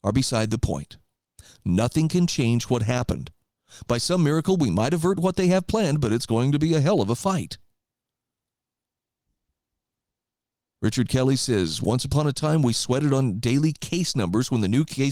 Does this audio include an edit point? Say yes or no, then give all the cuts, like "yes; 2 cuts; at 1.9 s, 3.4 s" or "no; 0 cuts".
no; 0 cuts